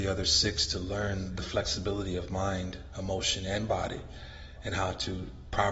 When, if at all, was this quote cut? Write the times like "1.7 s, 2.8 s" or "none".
none